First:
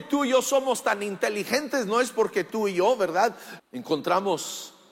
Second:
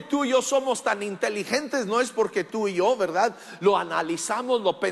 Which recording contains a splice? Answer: first; 1 cut; at 3.6 s

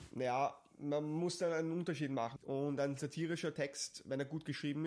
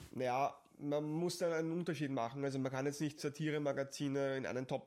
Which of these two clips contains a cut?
first; 1 cut; at 2.4 s

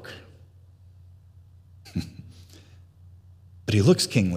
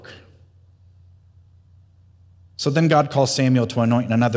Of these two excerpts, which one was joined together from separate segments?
first; 1 cut; at 1.9 s

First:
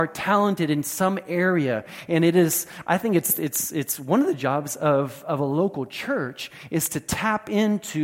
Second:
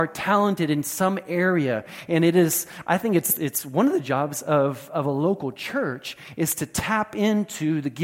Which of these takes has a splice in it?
second; 1 cut; at 3.4 s

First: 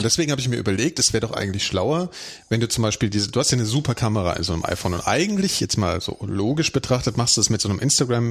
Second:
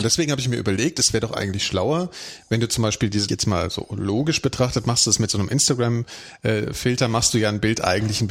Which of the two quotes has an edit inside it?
second; 1 cut; at 3.3 s

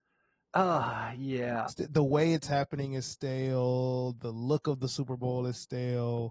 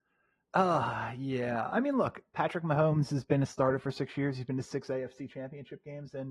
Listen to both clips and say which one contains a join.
first; 1 cut; at 1.7 s

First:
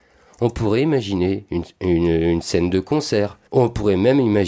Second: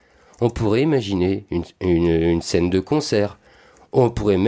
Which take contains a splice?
first; 1 cut; at 3.5 s

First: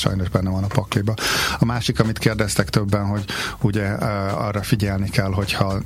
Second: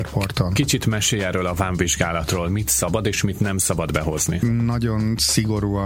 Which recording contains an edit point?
second; 1 cut; at 4.4 s

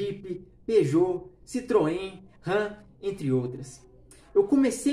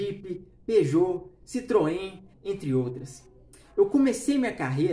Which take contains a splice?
second; 1 cut; at 2.3 s

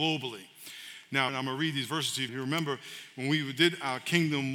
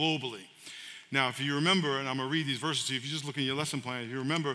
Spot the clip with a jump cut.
first; 2 cuts; at 1.3 s, 2.3 s

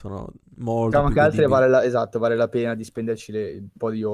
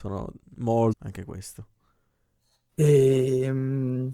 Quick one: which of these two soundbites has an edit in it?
second; 1 cut; at 0.9 s

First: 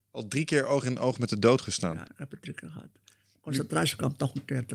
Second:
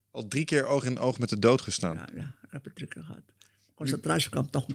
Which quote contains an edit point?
first; 1 cut; at 2.0 s

